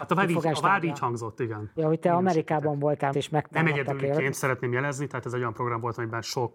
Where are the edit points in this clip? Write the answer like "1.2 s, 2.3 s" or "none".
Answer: 1.8 s, 3.1 s